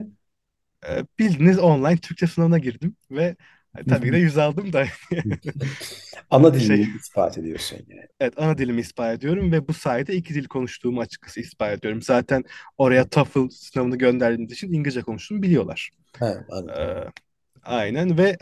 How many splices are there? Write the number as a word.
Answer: one